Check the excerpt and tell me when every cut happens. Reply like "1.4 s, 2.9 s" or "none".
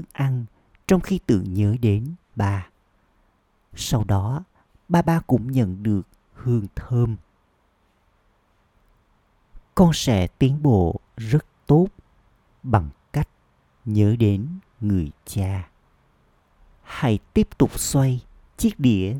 2.3 s